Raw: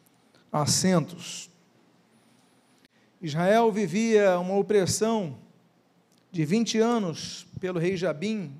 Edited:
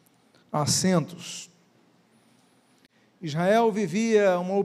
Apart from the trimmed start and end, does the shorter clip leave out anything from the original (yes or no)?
no